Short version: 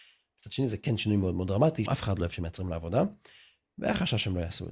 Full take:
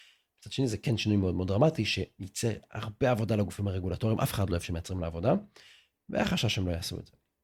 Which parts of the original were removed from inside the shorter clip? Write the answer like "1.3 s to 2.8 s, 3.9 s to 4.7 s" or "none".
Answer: 1.9 s to 4.2 s